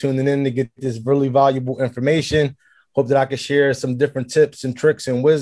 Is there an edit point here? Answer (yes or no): no